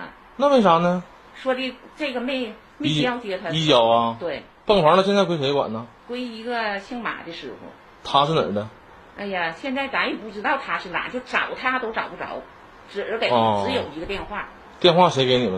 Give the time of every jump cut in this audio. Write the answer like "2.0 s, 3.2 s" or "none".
none